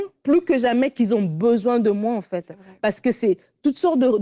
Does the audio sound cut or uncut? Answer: uncut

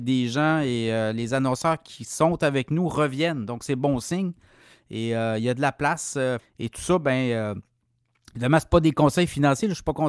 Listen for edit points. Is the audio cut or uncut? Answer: cut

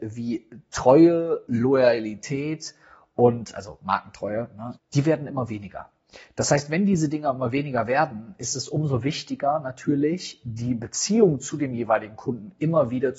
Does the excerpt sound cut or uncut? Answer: cut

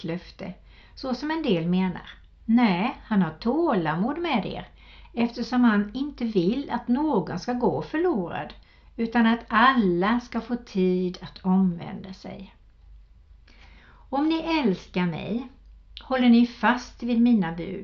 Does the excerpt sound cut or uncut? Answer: uncut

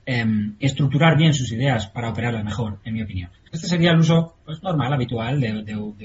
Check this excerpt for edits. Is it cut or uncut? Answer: cut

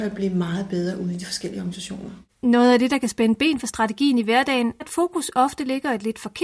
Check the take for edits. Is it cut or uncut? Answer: cut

